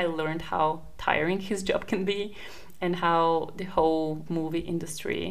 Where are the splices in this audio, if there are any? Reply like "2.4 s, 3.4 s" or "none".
4.3 s